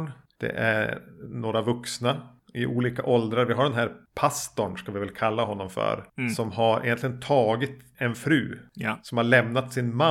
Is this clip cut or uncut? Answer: uncut